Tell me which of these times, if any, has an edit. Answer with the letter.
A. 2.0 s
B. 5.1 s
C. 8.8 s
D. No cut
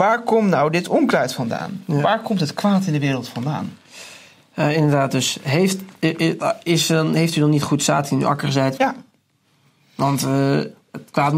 C